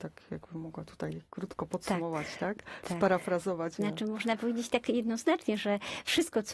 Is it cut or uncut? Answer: cut